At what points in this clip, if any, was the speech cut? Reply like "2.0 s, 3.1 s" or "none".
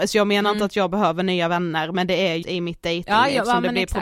2.4 s